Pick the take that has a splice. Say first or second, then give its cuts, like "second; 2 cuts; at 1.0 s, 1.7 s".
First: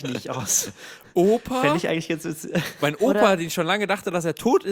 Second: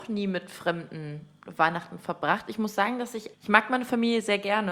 second; 1 cut; at 3.3 s